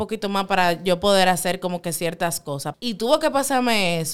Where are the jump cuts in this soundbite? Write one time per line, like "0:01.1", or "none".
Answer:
0:02.7